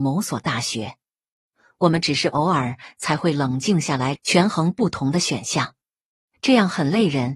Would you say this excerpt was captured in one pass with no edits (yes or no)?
no